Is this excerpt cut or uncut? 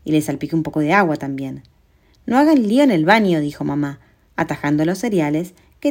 uncut